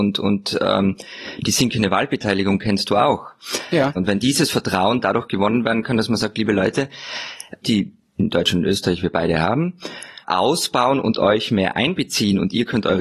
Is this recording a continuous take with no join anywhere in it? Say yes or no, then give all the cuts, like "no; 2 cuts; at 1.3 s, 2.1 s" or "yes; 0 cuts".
no; 3 cuts; at 4.0 s, 7.6 s, 10.2 s